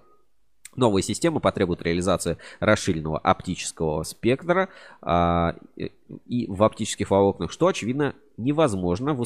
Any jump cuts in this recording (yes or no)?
no